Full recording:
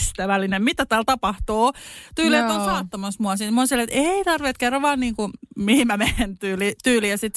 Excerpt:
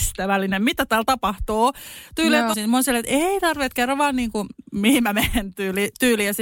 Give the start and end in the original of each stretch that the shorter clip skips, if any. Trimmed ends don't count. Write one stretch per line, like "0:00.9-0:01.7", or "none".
0:02.5-0:03.4

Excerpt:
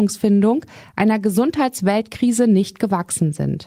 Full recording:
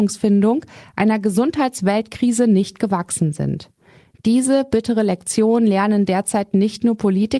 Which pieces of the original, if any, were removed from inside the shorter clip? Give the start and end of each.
none

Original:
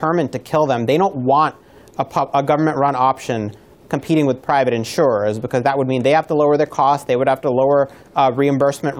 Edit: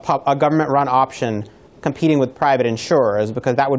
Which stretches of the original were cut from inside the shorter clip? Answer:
none

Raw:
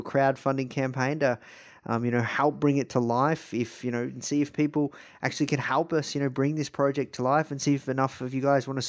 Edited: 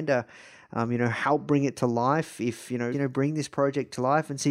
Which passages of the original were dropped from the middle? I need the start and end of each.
0:04.0-0:06.1

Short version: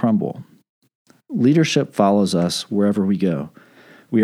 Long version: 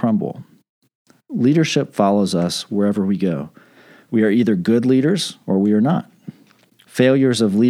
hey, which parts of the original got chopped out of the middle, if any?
none

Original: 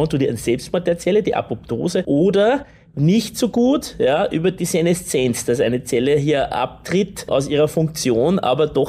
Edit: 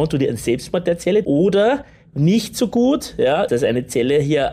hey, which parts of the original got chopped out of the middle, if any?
0:01.2-0:02.1
0:04.3-0:05.5

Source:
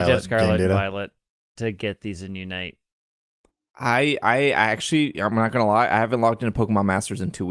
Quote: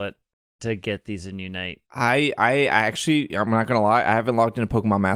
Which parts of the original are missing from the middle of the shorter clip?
0:02.8-0:03.7

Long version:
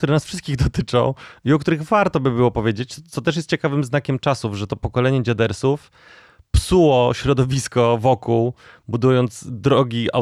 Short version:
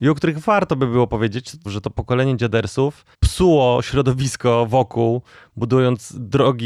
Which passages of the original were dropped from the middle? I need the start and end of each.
0:03.1-0:04.5
0:06.0-0:06.5

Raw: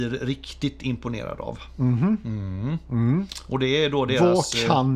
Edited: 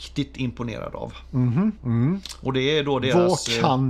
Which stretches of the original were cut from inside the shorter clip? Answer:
0:02.2-0:02.8

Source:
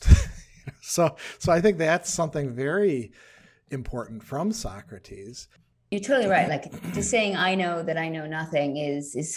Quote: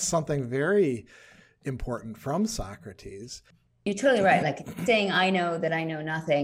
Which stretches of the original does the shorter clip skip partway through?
0:06.9-0:07.1

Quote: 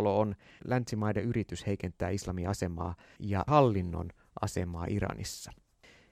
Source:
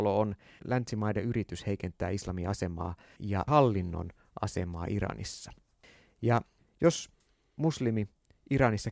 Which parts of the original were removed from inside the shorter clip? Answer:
none

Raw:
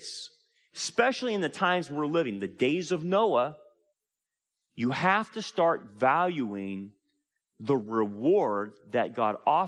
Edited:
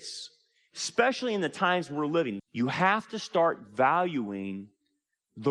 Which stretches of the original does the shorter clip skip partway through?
0:02.4-0:04.6

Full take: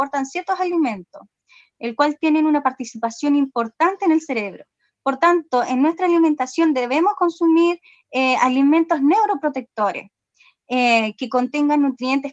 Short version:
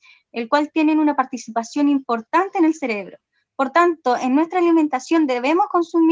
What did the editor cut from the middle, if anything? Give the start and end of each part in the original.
none

